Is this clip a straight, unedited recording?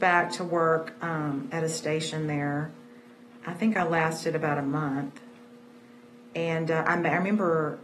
yes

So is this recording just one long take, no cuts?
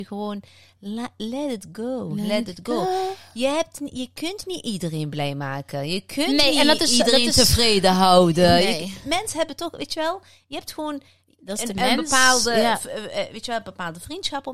yes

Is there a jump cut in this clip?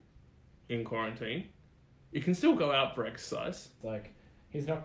yes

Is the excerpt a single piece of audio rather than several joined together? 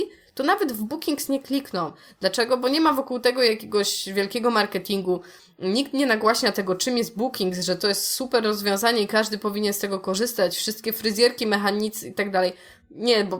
yes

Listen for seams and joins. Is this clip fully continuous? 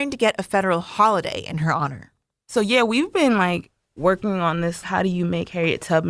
no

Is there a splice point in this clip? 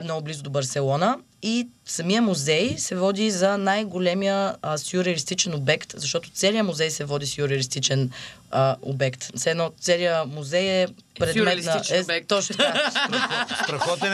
no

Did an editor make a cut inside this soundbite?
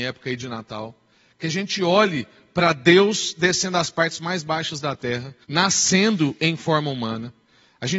yes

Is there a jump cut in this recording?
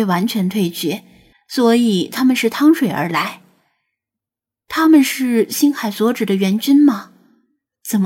yes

